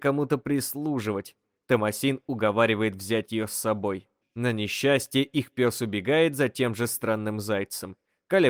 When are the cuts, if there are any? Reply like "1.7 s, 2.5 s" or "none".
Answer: 4.2 s